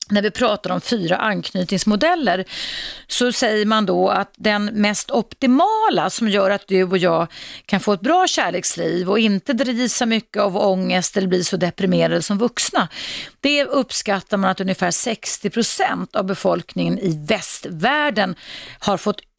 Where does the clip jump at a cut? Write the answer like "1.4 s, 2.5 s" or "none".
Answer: none